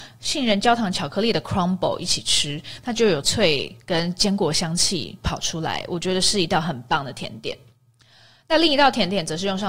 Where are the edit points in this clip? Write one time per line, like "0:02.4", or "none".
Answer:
0:03.2